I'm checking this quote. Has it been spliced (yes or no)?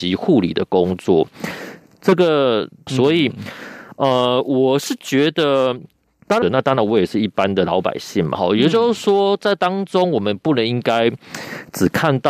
yes